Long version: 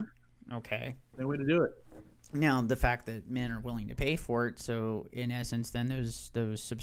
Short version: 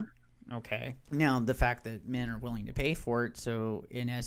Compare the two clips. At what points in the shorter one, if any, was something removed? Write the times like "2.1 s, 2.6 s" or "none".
1.1 s